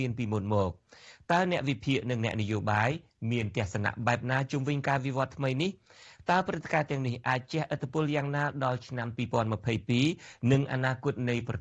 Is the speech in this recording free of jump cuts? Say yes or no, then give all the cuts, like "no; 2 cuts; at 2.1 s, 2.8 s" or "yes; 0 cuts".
yes; 0 cuts